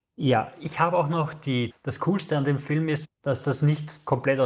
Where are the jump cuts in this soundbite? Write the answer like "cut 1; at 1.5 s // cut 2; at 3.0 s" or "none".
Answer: cut 1; at 1.7 s // cut 2; at 3.0 s